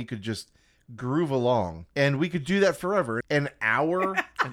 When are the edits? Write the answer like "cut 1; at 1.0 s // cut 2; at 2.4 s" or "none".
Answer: cut 1; at 1.9 s // cut 2; at 3.2 s